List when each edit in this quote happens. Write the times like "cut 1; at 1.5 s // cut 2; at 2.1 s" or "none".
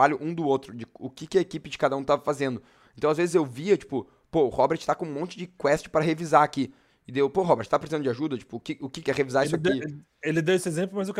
cut 1; at 9.0 s